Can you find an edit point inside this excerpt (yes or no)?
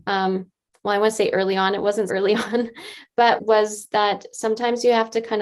yes